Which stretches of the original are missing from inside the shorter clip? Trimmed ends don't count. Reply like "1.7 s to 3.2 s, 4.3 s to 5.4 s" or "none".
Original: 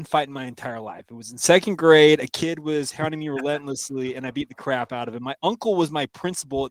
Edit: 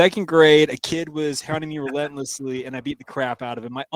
none